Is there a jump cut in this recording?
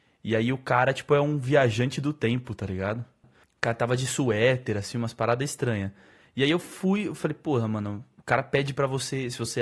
yes; 1 cut; at 3.2 s

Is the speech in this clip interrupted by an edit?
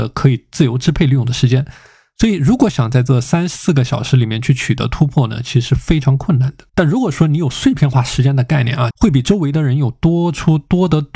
yes; 2 cuts; at 6.7 s, 8.9 s

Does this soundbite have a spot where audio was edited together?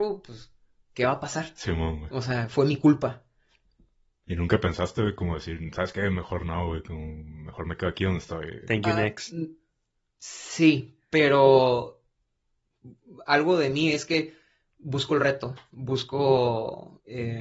no; 0 cuts

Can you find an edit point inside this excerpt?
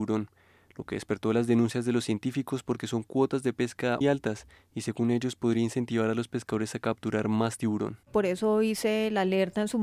yes; 2 cuts; at 4.0 s, 8.0 s

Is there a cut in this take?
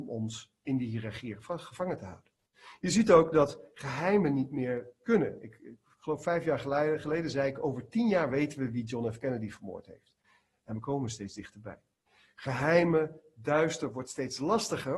no; 0 cuts

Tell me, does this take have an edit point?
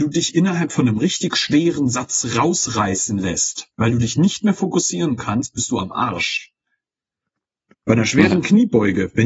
no; 0 cuts

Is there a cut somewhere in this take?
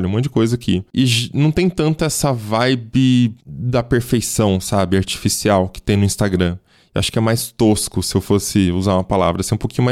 no; 0 cuts

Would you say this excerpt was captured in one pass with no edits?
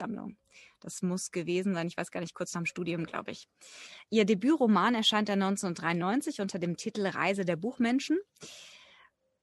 yes; 0 cuts

